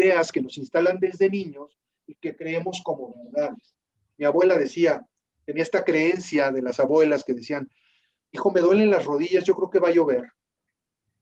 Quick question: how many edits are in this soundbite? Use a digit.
1